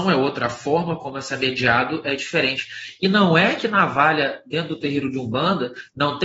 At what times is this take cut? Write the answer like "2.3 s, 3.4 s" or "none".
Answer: none